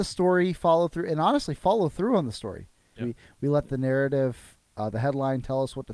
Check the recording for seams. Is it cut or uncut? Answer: cut